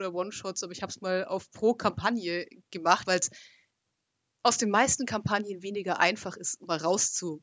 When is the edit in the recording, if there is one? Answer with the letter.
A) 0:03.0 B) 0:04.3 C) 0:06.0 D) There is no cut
A